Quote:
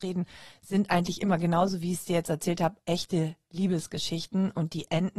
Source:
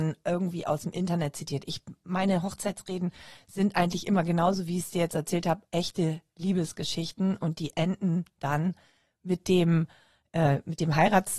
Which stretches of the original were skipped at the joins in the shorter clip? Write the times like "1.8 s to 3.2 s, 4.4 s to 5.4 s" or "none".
none